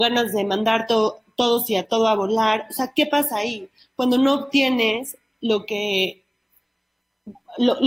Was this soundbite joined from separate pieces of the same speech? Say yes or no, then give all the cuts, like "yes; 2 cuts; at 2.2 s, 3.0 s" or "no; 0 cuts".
no; 0 cuts